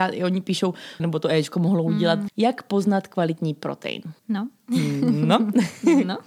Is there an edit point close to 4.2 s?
yes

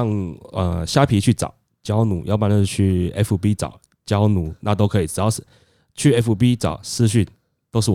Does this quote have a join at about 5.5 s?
no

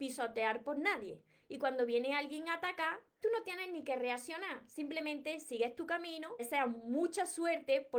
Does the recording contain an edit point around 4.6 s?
no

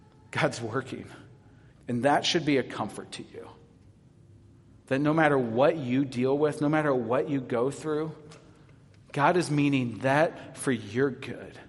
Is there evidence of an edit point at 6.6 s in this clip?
no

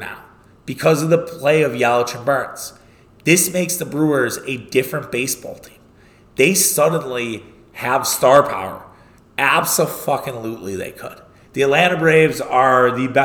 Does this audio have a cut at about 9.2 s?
yes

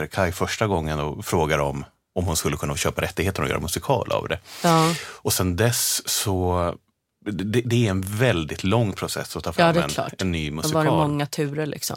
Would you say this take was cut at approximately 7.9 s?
no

